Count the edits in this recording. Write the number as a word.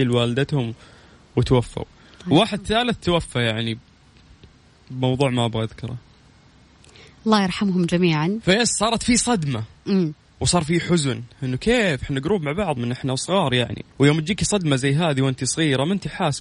two